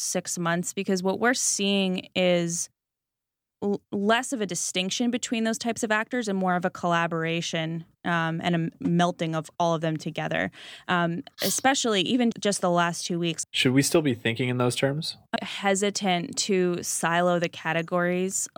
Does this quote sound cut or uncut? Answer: cut